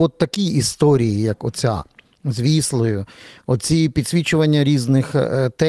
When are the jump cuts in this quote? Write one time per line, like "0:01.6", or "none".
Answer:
none